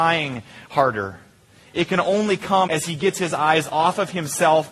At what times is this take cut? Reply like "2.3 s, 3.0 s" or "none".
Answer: 2.7 s